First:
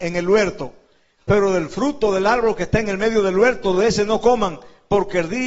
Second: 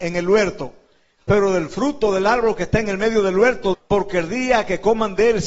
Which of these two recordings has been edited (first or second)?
second